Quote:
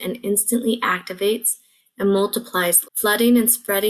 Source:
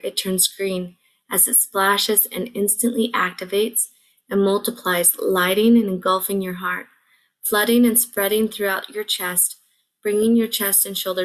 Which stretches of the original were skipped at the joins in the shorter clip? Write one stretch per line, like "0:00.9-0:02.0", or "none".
0:05.2-0:07.3